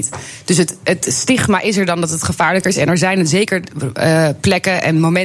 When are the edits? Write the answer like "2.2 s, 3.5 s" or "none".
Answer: none